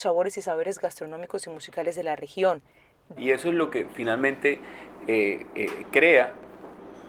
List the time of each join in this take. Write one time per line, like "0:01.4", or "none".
0:03.2